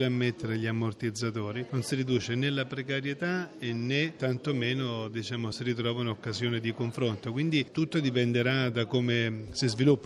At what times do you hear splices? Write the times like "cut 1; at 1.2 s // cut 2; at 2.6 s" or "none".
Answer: none